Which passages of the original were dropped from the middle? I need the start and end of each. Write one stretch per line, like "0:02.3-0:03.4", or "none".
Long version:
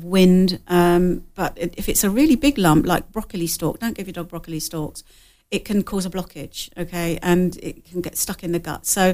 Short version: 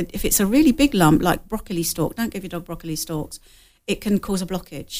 none